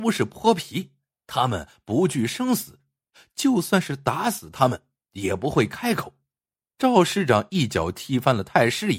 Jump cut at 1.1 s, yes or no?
no